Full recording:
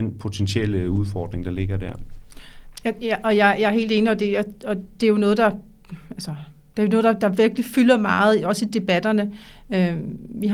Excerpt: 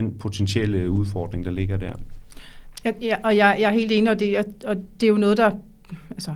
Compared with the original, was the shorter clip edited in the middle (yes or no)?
no